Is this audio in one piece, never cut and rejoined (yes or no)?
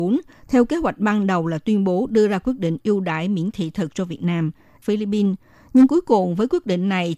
no